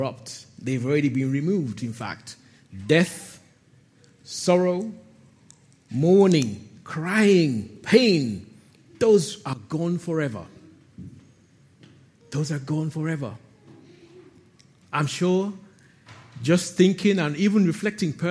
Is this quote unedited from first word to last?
yes; 0 cuts

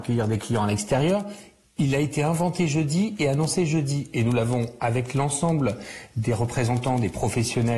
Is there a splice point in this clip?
no; 0 cuts

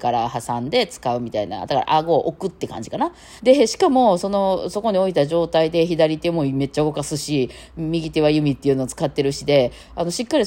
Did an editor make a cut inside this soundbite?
yes; 1 cut; at 3.4 s

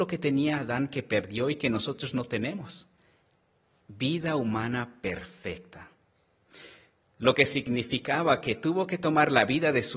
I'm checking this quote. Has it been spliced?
no; 0 cuts

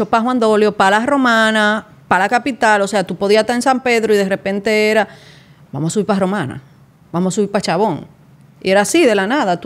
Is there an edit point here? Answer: no; 0 cuts

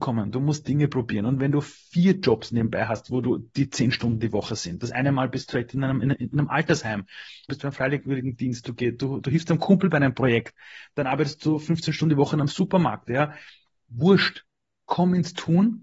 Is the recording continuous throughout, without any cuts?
no; 1 cut; at 7.5 s

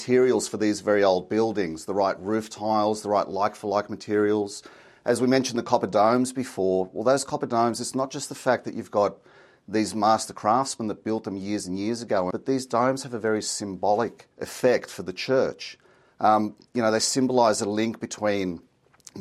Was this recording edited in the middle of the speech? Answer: yes; 2 cuts; at 12.3 s, 14.3 s

